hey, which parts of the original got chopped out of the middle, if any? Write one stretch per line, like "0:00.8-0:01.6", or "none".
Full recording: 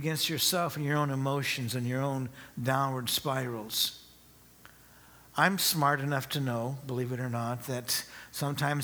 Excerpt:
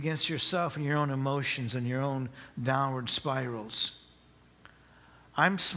none